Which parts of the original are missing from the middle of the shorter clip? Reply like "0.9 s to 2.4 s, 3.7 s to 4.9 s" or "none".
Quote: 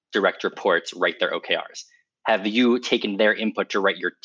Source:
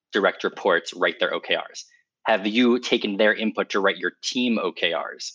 none